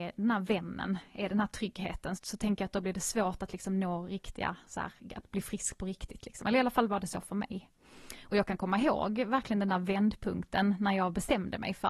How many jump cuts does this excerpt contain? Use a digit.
1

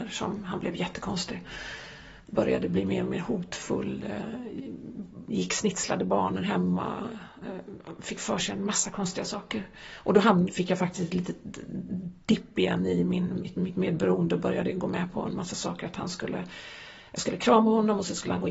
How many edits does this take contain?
0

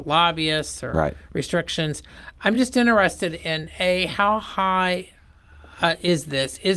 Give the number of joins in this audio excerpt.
0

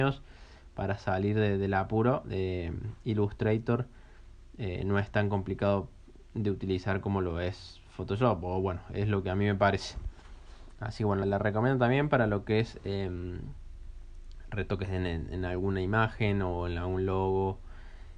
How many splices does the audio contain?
1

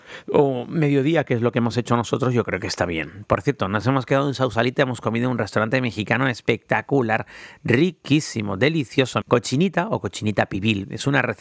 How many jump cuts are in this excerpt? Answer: 1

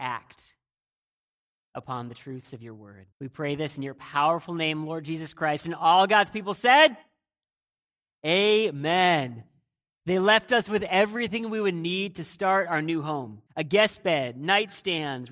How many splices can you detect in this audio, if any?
3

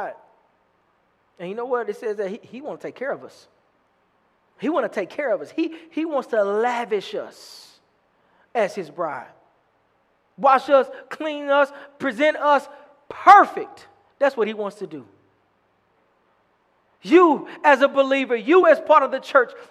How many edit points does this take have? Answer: 0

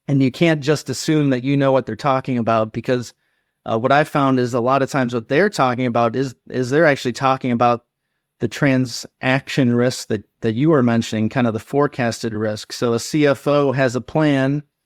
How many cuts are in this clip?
0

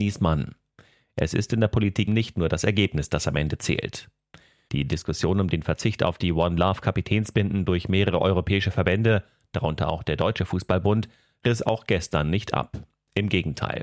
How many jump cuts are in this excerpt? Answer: 2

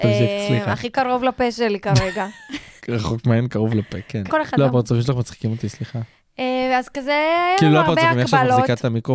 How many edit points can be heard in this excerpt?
2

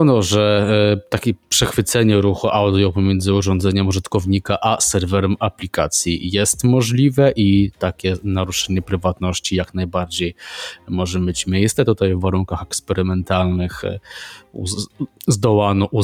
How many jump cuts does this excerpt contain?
0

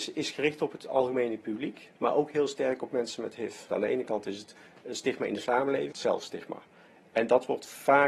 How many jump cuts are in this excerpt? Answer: 2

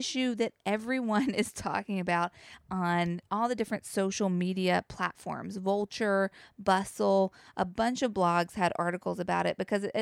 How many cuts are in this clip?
0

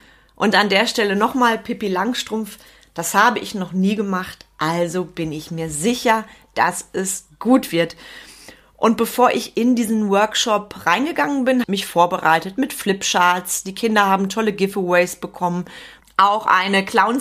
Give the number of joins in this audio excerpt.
2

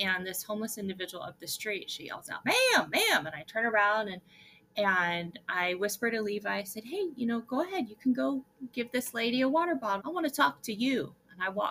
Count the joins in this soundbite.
2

